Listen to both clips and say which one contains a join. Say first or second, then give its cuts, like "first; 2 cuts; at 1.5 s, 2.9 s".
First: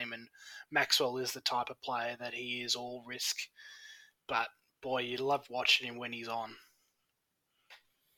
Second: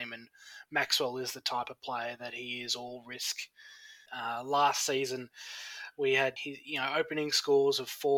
second; 2 cuts; at 4.1 s, 6.4 s